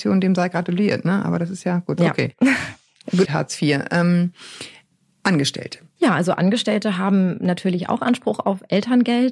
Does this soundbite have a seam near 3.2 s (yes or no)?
yes